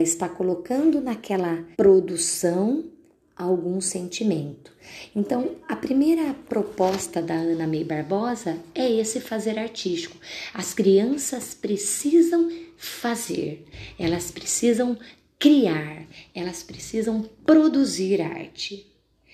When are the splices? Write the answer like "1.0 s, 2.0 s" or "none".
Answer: 1.7 s